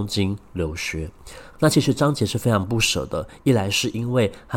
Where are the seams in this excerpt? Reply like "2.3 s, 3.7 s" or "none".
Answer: 1.5 s